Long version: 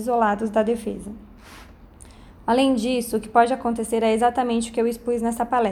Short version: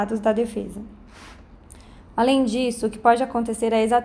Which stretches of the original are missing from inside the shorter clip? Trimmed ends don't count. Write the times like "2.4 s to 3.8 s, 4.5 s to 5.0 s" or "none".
none